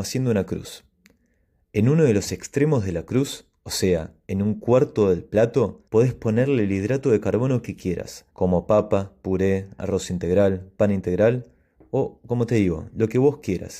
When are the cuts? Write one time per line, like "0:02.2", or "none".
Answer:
0:05.9
0:08.3

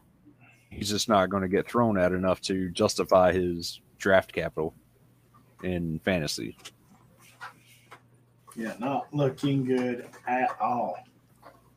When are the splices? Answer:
0:08.4

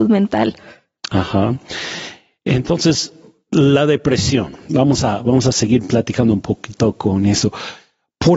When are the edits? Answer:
none

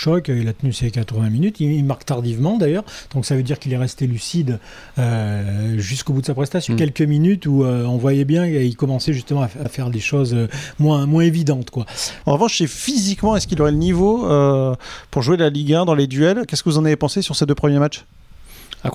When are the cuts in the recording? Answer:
0:06.7
0:09.6
0:12.2

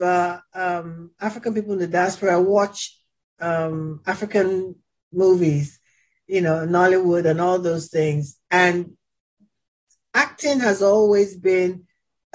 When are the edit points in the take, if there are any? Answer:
none

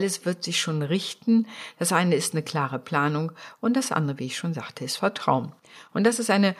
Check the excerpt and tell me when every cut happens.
none

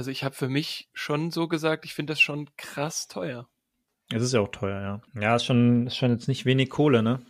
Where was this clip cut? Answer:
0:05.1

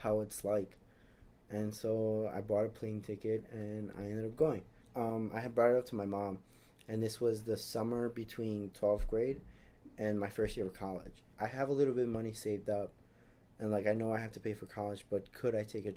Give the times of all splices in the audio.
0:04.8

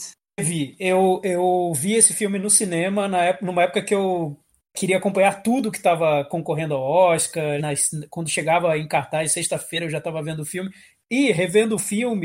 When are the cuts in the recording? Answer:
0:07.6
0:10.9

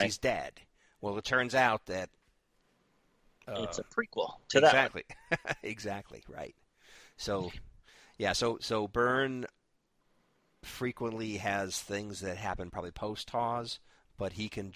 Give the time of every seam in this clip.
none

